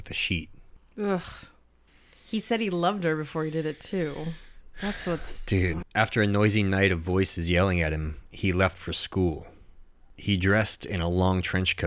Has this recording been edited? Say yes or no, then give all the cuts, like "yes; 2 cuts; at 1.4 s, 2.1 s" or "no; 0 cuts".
yes; 1 cut; at 5.8 s